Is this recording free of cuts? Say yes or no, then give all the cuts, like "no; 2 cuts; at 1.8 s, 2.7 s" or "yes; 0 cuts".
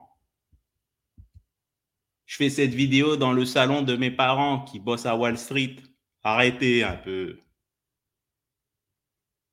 yes; 0 cuts